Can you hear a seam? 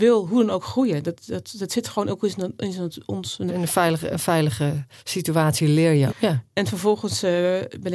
yes; 2 cuts; at 3.5 s, 6.1 s

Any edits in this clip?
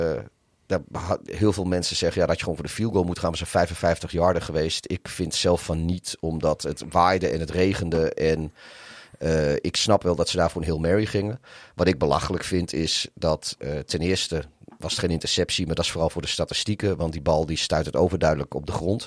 no; 0 cuts

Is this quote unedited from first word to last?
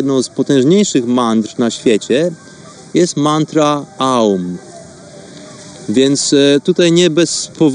yes; 0 cuts

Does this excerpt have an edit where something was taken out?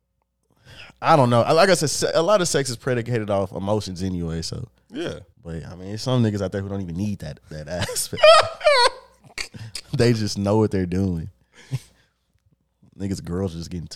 yes; 1 cut; at 5.3 s

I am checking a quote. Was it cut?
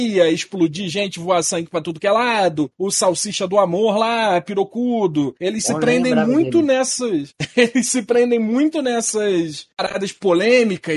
no; 0 cuts

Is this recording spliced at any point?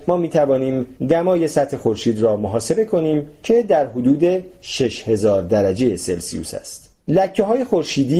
yes; 1 cut; at 7.0 s

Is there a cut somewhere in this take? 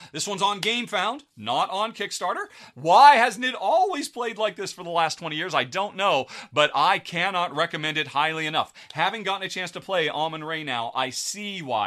yes; 1 cut; at 2.7 s

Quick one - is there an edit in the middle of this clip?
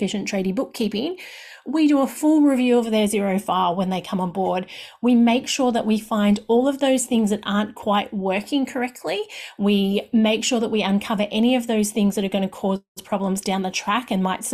no; 0 cuts

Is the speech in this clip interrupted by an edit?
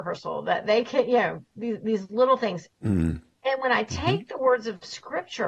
yes; 1 cut; at 2.7 s

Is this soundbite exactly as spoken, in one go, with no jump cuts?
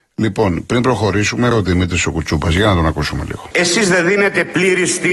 no; 2 cuts; at 1.5 s, 3.5 s

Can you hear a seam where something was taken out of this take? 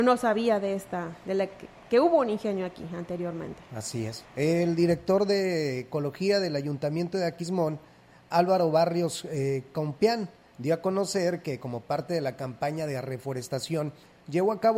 yes; 1 cut; at 4.2 s

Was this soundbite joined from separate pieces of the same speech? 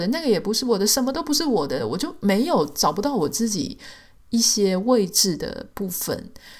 yes; 1 cut; at 1.8 s

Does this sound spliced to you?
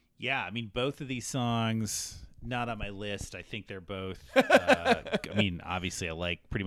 no; 0 cuts

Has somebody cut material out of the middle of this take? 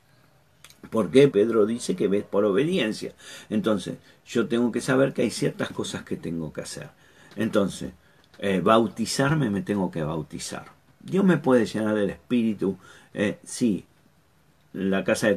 yes; 1 cut; at 1.3 s

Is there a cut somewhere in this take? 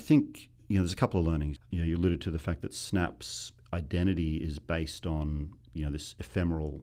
yes; 1 cut; at 1.6 s

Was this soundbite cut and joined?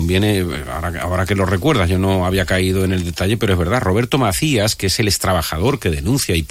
no; 0 cuts

